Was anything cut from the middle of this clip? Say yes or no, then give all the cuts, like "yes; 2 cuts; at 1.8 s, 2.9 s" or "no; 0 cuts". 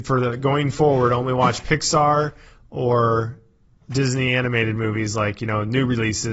no; 0 cuts